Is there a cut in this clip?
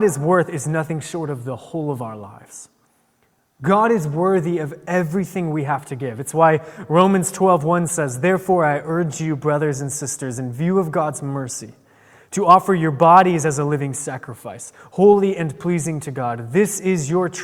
no; 0 cuts

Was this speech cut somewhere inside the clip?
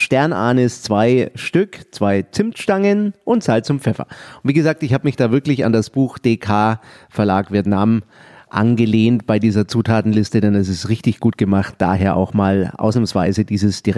no; 0 cuts

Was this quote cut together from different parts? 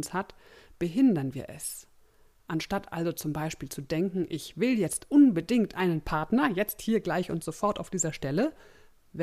no; 0 cuts

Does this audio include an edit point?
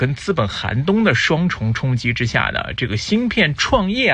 no; 0 cuts

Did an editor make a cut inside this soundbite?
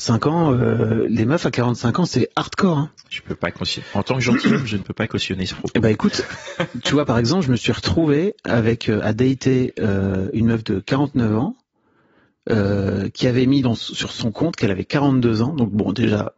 no; 0 cuts

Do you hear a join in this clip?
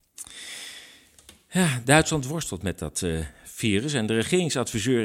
no; 0 cuts

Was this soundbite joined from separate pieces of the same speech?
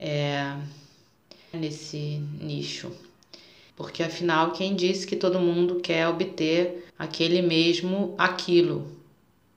yes; 3 cuts; at 1.5 s, 3.7 s, 6.9 s

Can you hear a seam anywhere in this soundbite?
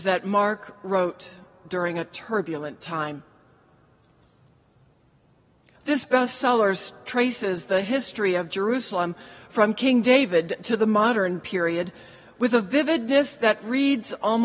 yes; 1 cut; at 5.8 s

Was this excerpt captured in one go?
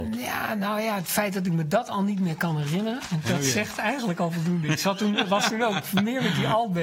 yes; 0 cuts

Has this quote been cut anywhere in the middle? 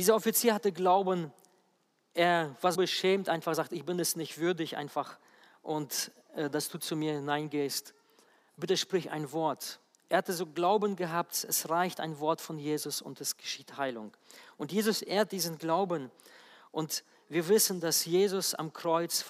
yes; 1 cut; at 2.7 s

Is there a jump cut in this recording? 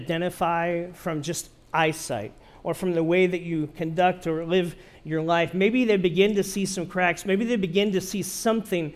no; 0 cuts

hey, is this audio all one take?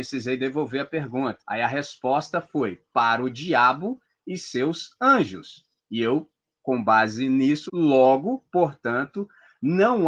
no; 2 cuts; at 1.4 s, 7.7 s

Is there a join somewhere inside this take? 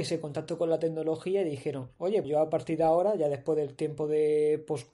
yes; 1 cut; at 2.2 s

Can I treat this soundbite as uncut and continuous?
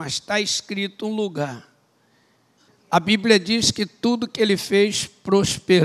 no; 1 cut; at 2.7 s

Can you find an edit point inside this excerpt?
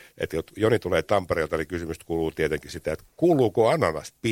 no; 0 cuts

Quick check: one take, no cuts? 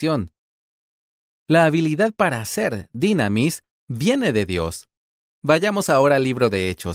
yes; 0 cuts

